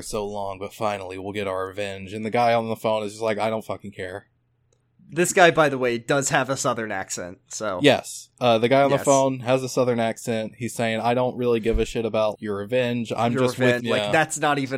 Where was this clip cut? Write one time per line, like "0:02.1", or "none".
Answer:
0:12.3
0:13.8

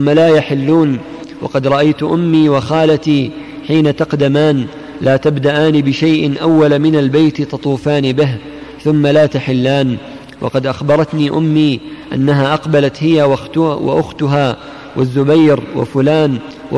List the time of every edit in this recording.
none

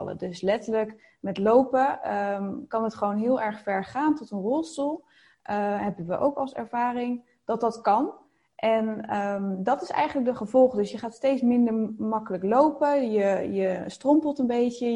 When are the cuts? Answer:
none

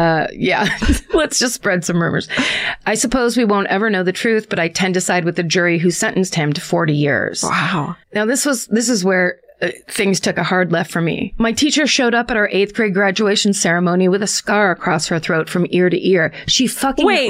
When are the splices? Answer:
0:08.0

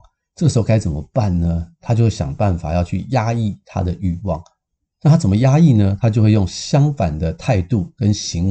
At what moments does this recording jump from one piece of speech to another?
none

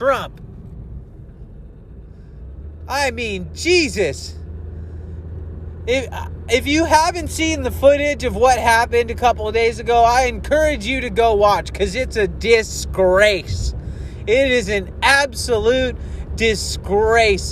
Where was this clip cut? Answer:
none

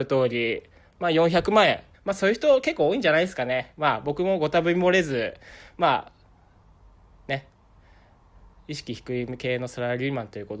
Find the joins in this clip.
0:01.9

